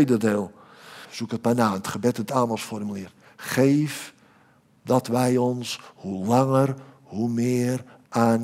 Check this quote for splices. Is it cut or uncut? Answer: cut